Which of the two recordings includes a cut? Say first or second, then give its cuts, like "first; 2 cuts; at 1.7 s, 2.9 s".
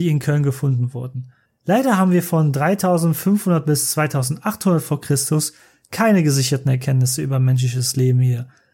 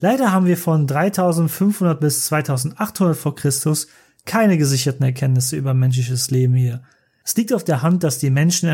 first; 1 cut; at 1.5 s